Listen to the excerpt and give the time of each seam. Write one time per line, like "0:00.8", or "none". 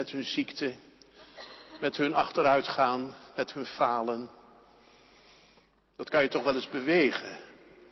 none